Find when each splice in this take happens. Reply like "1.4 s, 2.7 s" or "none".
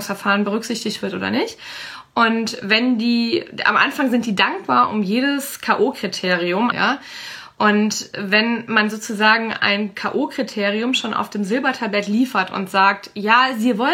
6.7 s